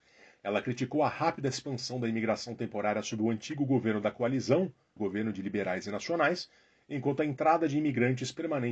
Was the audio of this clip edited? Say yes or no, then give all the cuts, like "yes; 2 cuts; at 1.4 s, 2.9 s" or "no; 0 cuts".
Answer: yes; 1 cut; at 5.0 s